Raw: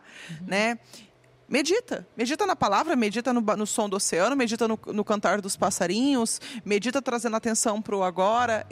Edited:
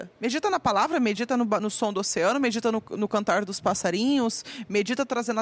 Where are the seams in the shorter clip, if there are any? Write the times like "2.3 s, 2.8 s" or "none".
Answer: none